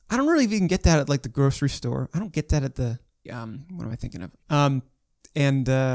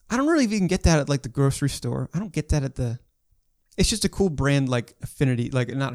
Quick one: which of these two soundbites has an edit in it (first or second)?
first